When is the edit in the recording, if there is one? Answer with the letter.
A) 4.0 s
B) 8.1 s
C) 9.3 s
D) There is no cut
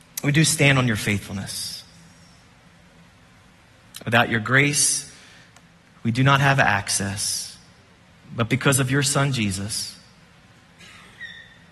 A